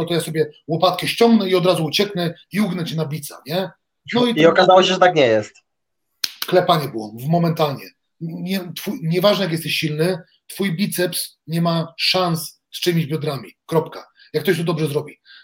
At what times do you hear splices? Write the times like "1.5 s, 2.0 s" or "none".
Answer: none